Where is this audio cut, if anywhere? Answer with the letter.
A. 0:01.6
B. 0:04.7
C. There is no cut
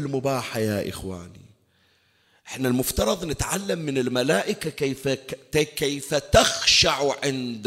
C